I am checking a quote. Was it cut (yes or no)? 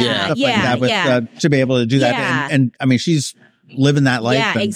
no